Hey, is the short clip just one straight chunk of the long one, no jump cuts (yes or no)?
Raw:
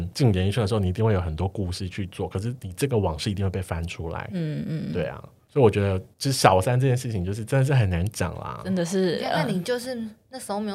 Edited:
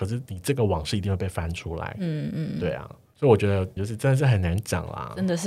no